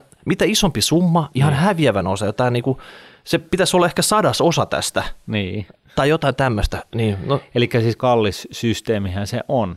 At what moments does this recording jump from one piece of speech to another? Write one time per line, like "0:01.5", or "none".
0:01.3
0:06.9
0:08.0